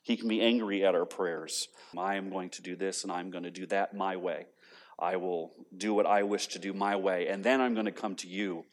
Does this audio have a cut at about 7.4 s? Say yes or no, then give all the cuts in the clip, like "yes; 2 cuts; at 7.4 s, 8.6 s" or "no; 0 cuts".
no; 1 cut; at 1.9 s